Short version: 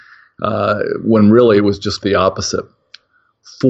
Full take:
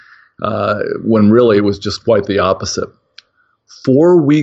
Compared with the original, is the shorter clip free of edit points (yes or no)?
no